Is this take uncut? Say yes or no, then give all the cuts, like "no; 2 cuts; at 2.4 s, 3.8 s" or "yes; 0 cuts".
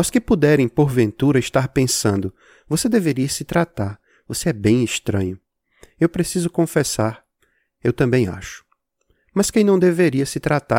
yes; 0 cuts